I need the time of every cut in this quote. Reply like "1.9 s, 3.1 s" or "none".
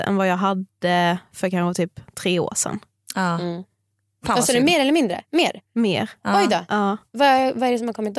none

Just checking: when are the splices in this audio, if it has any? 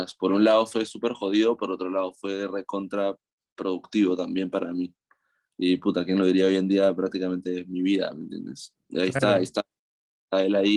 none

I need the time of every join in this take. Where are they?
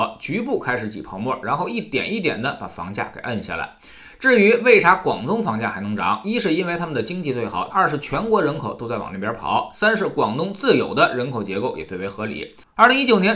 7.7 s

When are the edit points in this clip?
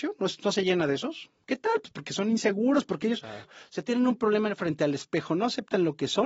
3.4 s

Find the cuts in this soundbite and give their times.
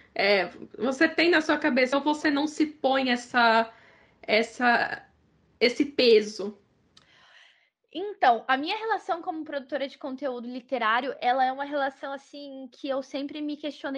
1.9 s

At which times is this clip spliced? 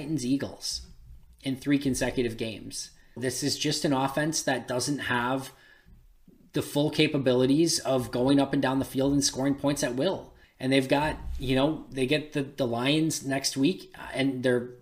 3.2 s, 10.4 s

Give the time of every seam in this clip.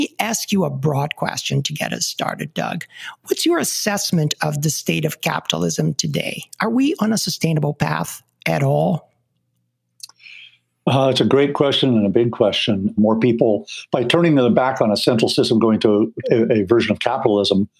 12.9 s, 16.2 s

